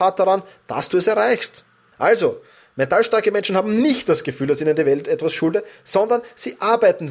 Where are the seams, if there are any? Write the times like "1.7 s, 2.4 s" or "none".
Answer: 1.9 s